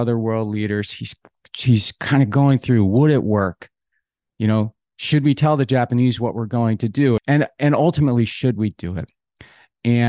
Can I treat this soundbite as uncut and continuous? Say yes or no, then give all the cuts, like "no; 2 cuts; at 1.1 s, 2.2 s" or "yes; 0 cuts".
no; 1 cut; at 7.2 s